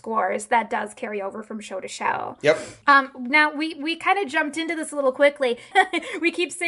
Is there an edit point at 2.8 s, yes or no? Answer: no